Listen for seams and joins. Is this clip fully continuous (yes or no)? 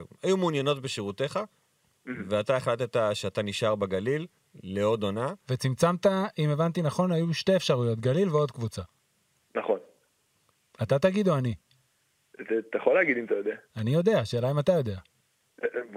yes